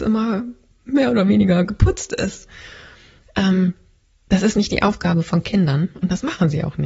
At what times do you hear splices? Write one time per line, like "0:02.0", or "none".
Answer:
none